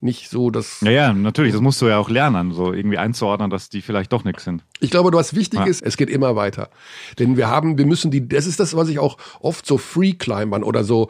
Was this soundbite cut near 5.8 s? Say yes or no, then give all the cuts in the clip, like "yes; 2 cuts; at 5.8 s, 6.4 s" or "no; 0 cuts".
yes; 1 cut; at 5.8 s